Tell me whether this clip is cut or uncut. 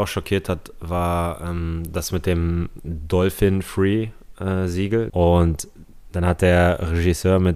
cut